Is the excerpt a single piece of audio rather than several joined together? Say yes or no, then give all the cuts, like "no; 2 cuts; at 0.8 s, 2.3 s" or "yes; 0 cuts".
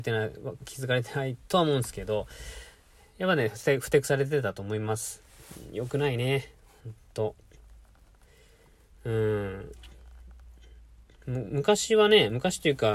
yes; 0 cuts